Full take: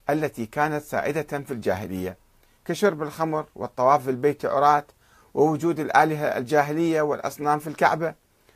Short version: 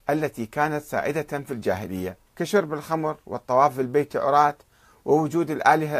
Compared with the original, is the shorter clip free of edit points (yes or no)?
no